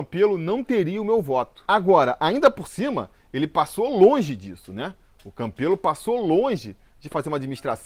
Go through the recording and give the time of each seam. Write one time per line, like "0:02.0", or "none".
none